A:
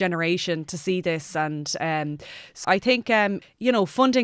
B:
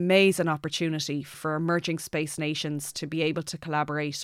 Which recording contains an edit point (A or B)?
A